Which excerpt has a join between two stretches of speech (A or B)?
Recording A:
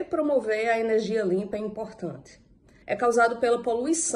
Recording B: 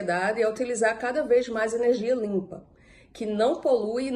A